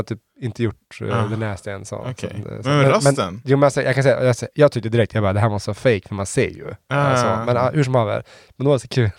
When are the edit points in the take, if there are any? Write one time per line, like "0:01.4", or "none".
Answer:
none